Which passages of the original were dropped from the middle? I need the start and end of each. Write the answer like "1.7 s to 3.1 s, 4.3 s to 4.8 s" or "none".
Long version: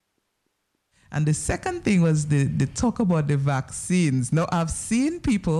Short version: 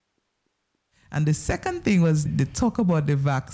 2.3 s to 2.5 s